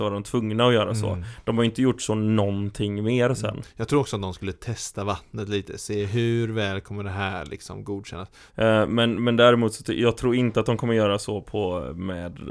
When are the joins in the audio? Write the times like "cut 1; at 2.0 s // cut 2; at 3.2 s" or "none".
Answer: cut 1; at 8.5 s